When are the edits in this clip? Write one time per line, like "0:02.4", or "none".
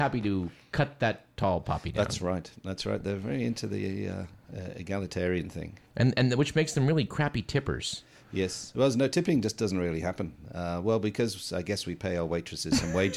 0:05.9